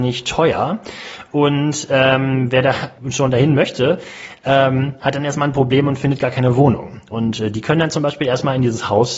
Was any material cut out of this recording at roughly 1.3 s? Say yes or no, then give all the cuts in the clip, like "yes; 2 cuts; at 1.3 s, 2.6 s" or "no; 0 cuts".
no; 1 cut; at 3.0 s